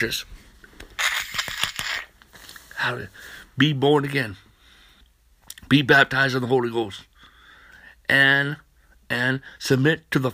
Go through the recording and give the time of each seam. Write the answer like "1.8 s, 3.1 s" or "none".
none